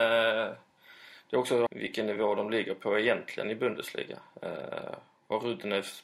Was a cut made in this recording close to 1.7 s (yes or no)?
yes